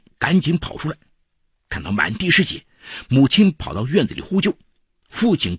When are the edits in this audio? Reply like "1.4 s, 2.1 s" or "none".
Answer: none